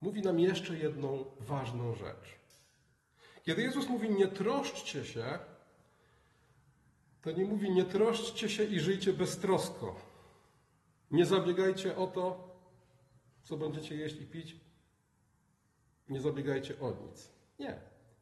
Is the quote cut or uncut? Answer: uncut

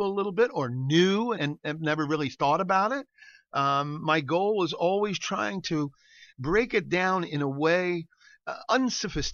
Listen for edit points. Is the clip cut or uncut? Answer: cut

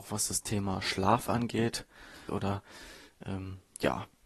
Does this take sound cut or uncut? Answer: cut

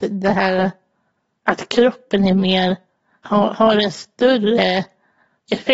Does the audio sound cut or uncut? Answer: uncut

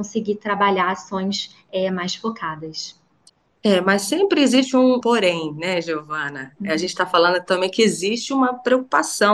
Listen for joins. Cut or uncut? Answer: cut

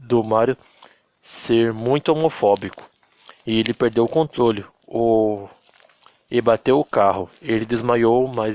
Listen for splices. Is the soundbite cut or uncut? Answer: uncut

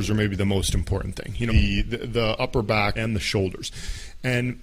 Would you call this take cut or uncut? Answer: cut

